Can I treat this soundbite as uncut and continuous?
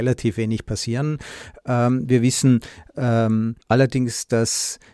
no; 1 cut; at 3.6 s

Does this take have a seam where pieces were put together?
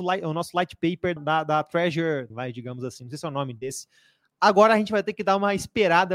yes; 2 cuts; at 1.2 s, 2.3 s

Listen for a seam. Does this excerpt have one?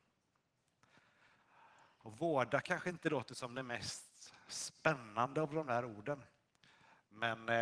no; 0 cuts

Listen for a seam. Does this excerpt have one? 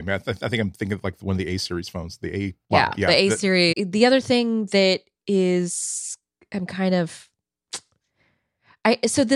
yes; 2 cuts; at 2.6 s, 3.7 s

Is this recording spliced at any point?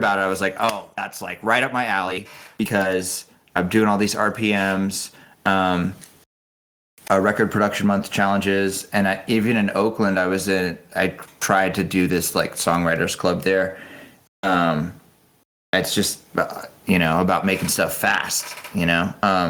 no; 0 cuts

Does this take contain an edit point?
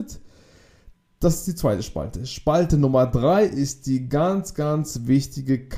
no; 0 cuts

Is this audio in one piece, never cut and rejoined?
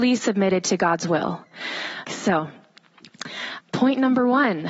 no; 2 cuts; at 2.0 s, 3.6 s

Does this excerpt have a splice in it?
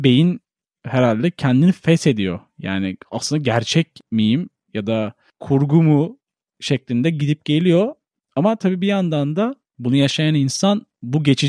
no; 0 cuts

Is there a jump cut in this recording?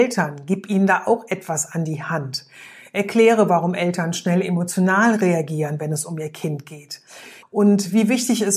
yes; 1 cut; at 7.4 s

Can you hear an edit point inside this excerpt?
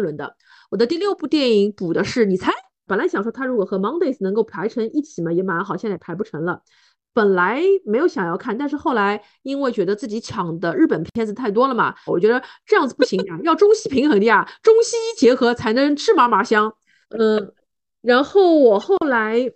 yes; 3 cuts; at 2.9 s, 12.1 s, 17.0 s

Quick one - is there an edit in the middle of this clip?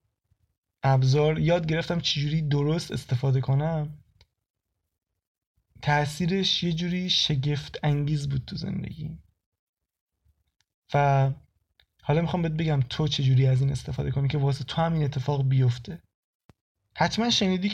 no; 0 cuts

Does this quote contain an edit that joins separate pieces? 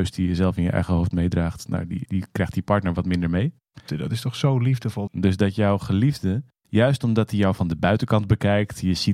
yes; 3 cuts; at 2.1 s, 3.9 s, 5.1 s

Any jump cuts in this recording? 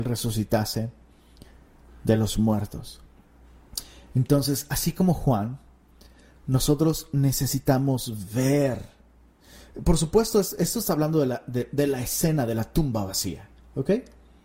no; 0 cuts

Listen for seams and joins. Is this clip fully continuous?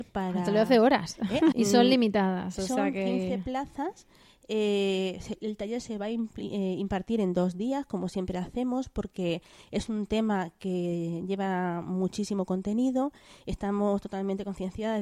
no; 1 cut; at 1.5 s

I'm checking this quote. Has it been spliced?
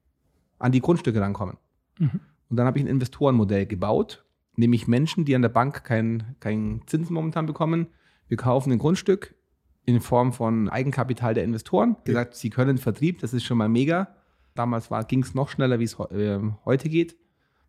yes; 3 cuts; at 10.7 s, 12.1 s, 14.6 s

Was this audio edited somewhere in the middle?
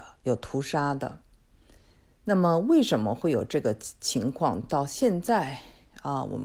no; 0 cuts

